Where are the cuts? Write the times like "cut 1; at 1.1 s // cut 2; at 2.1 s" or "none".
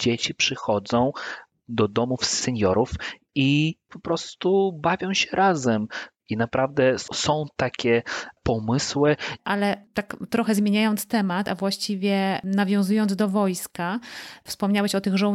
cut 1; at 6.2 s // cut 2; at 9.4 s